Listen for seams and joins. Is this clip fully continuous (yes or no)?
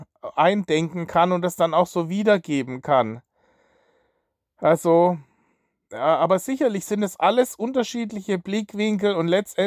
no